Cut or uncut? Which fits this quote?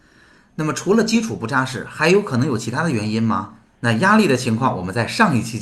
cut